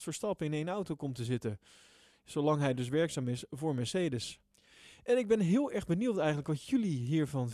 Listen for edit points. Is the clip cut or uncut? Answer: uncut